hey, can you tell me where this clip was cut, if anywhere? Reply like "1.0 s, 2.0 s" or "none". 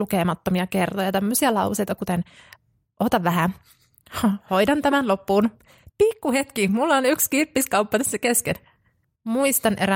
none